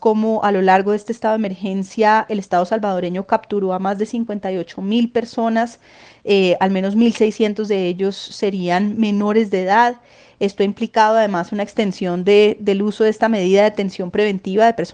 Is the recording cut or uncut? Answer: uncut